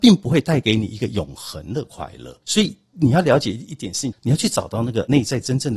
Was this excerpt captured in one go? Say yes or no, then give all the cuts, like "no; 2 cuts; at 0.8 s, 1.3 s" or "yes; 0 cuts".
no; 2 cuts; at 2.4 s, 4.1 s